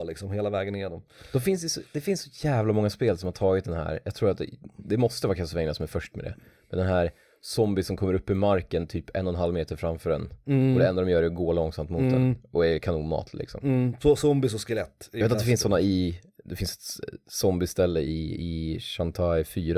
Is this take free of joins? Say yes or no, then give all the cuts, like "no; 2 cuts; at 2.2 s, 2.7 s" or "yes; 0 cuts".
yes; 0 cuts